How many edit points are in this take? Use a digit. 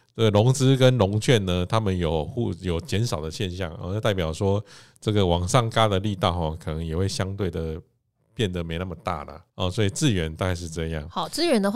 1